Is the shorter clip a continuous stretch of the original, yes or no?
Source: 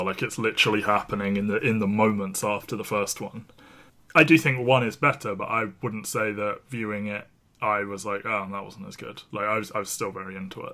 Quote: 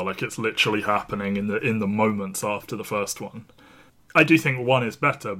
yes